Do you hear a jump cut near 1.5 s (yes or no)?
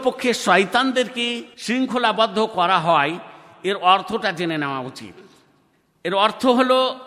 yes